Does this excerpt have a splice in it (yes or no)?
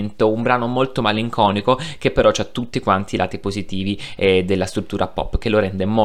no